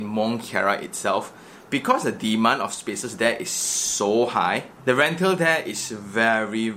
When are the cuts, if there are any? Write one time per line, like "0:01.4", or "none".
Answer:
none